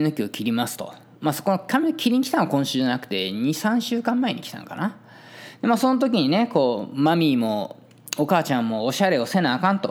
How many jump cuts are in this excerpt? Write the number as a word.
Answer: zero